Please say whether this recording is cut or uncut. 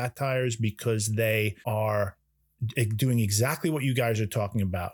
cut